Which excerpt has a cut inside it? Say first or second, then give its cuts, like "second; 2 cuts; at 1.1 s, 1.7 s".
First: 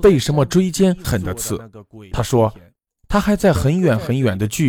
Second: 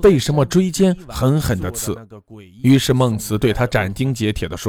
first; 2 cuts; at 1.0 s, 2.1 s